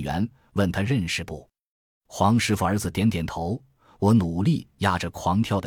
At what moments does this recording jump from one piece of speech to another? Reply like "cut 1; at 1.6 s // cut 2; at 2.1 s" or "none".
none